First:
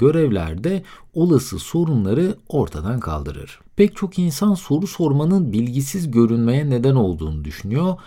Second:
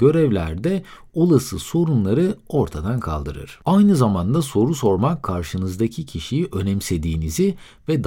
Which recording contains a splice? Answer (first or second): first